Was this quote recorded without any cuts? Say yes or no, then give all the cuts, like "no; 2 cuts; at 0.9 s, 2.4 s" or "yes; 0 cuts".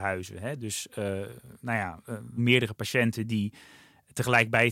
no; 1 cut; at 2.4 s